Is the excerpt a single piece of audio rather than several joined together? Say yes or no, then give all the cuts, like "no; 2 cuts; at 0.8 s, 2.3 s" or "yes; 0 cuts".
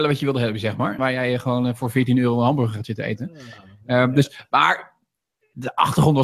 no; 1 cut; at 1.0 s